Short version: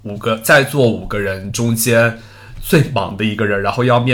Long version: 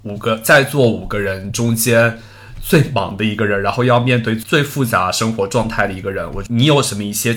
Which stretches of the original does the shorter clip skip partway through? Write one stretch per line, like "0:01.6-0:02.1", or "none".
none